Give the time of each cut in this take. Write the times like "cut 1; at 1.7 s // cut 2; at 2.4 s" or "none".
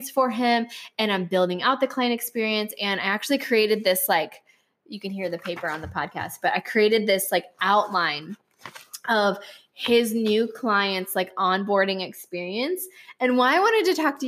none